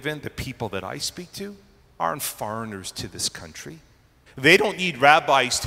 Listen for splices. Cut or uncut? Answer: cut